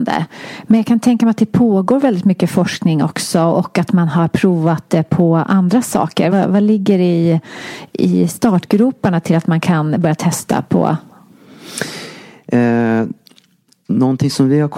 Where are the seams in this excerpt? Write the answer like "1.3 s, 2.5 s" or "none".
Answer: 6.3 s